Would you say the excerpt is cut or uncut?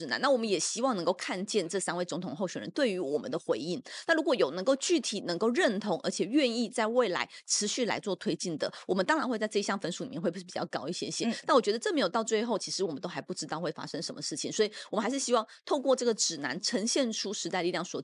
uncut